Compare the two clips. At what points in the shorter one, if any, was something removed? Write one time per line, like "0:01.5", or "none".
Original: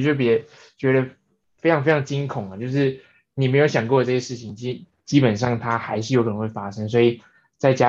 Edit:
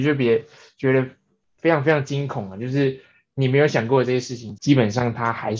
0:04.6